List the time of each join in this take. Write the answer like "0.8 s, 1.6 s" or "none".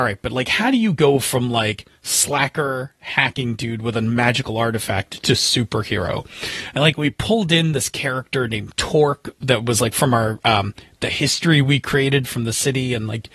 none